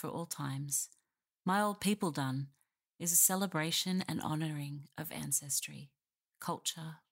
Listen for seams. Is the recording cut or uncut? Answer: uncut